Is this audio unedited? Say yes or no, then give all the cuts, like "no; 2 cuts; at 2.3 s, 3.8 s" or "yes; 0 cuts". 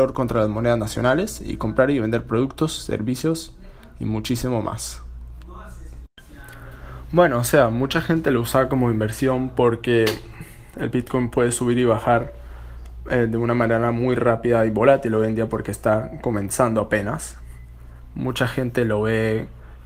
yes; 0 cuts